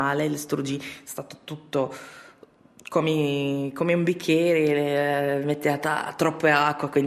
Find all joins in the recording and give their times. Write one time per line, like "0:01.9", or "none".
none